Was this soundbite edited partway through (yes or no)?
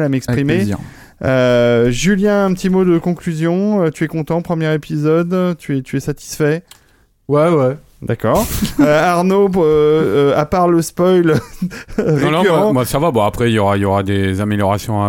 no